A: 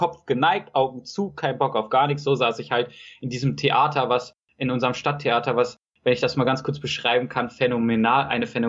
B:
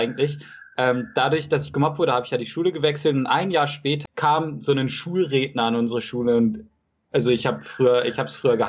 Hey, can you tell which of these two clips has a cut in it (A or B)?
B